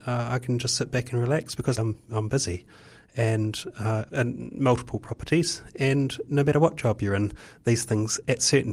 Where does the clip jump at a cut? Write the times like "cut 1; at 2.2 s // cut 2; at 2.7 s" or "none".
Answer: cut 1; at 1.8 s // cut 2; at 4.1 s